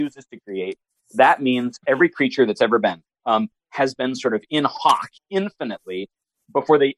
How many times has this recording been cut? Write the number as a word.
two